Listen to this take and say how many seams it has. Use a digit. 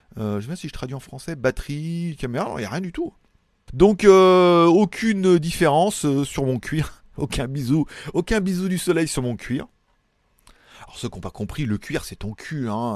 1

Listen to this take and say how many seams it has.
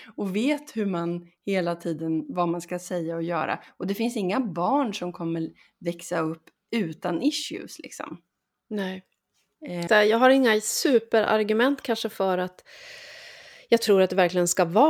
1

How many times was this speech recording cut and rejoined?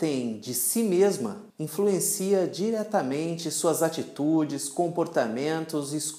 1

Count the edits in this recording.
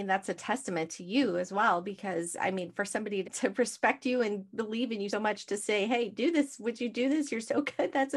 2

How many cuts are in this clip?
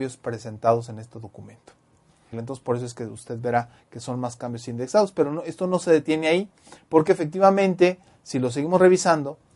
1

